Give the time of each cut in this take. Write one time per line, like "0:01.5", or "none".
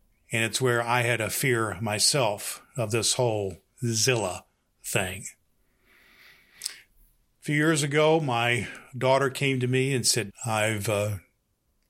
0:10.3